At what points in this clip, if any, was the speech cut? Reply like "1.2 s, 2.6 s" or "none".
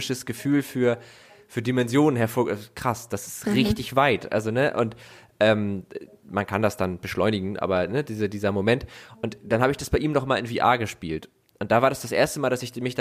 none

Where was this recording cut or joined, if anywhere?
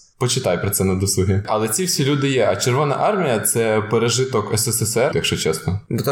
5.1 s

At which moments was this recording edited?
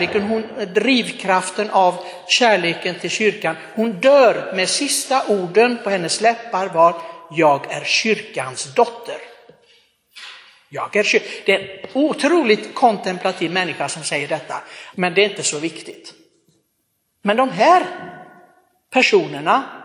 14.9 s

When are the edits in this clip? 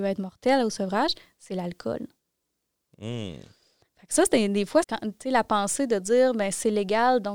4.8 s

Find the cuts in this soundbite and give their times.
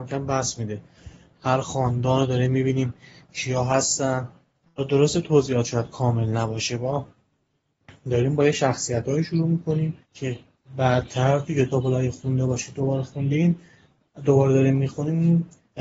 10.0 s

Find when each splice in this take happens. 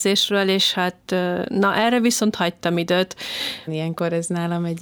3.7 s

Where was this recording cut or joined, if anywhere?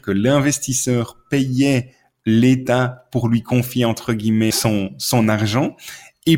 4.5 s

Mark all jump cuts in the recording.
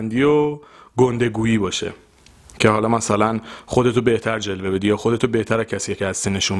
none

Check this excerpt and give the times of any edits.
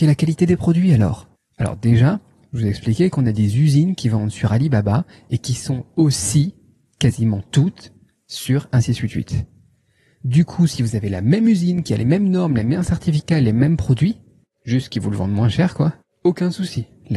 1.4 s

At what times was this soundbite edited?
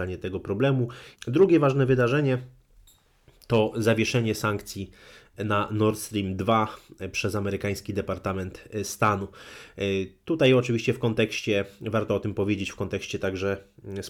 1.1 s

